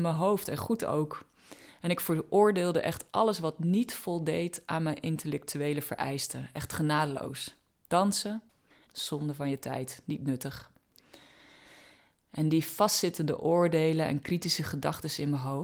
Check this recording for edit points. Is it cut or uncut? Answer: uncut